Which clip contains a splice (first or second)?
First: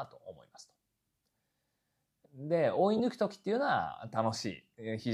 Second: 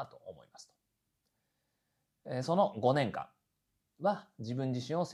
first